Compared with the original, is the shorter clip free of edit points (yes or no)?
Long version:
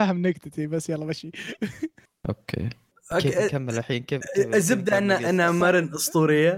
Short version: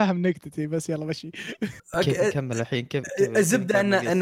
no